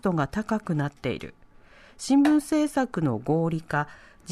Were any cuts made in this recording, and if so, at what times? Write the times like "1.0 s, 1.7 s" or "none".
none